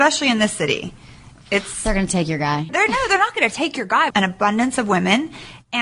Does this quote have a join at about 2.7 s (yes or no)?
yes